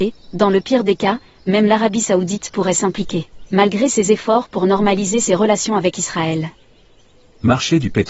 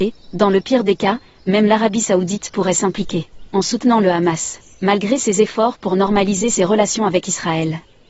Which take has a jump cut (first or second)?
first